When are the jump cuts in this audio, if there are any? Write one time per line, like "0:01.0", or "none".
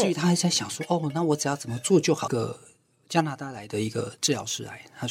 0:02.3